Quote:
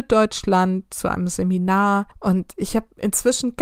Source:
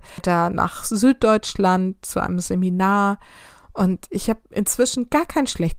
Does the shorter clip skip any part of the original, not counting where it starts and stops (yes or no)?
yes